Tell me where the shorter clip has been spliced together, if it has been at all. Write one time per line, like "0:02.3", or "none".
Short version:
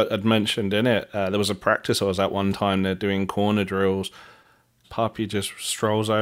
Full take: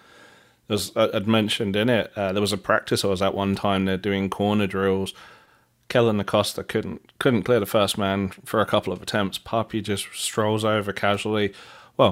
0:04.8

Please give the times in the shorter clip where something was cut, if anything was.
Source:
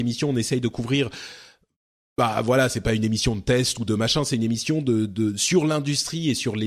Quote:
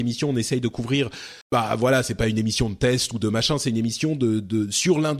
0:01.4

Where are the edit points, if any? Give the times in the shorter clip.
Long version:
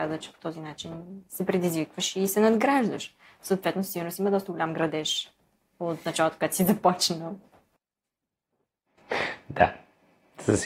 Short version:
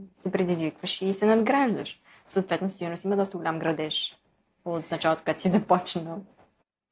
none

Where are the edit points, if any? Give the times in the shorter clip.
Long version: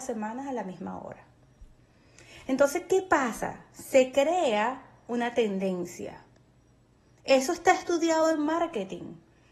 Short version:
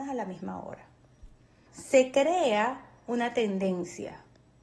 0:01.7

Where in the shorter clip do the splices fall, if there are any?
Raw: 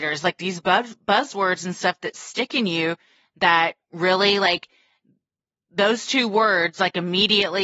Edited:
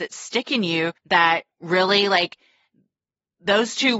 0:01.0

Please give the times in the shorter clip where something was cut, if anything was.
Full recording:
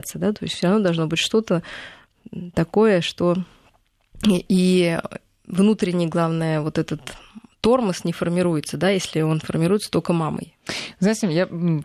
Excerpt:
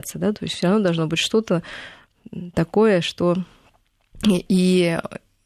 none

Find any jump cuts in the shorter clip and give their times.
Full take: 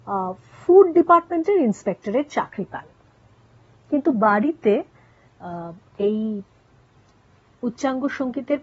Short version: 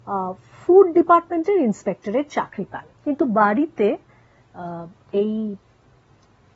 0:02.9

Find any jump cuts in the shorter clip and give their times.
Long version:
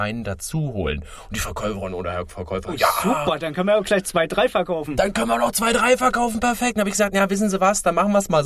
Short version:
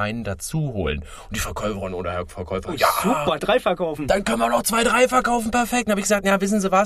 0:03.4

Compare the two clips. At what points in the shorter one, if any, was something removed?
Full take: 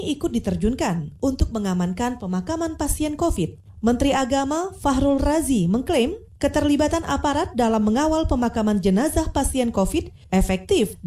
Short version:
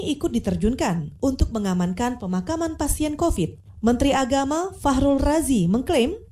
none

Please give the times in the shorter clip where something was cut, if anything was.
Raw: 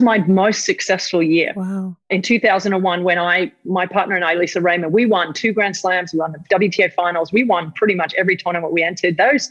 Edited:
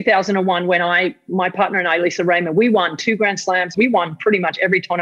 0:03.7

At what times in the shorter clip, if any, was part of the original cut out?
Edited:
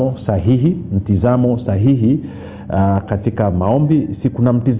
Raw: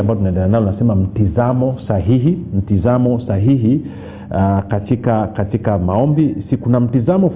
0:03.0

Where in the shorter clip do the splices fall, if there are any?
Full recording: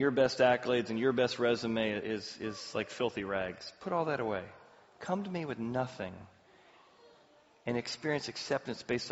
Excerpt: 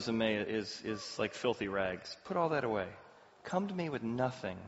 none

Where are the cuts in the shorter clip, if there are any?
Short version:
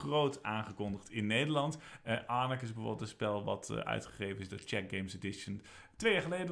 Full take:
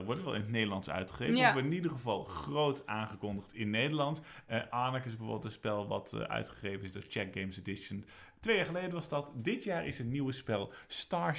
none

